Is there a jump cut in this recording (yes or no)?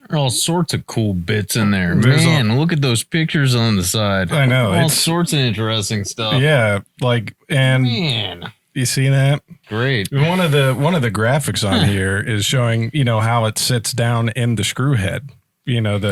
yes